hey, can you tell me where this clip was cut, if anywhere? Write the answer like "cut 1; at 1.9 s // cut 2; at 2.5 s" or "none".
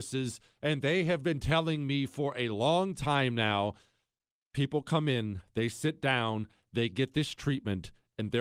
none